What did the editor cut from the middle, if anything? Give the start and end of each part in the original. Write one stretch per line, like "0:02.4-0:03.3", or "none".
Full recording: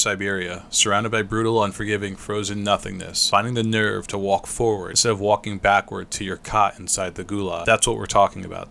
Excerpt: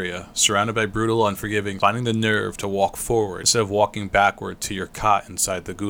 0:02.2-0:03.3